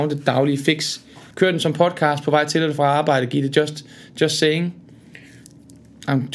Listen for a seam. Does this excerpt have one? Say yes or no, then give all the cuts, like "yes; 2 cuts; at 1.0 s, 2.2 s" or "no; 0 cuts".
no; 0 cuts